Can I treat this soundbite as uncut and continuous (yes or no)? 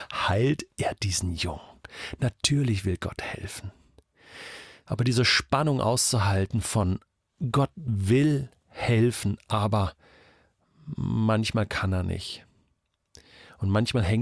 yes